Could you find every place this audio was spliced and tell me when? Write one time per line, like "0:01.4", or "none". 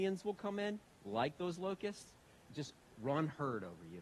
0:02.4